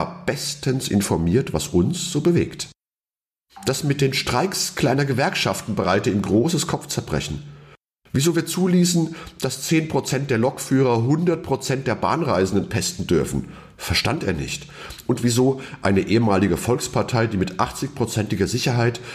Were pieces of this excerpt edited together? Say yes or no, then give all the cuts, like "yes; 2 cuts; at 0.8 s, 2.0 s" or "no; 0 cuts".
no; 0 cuts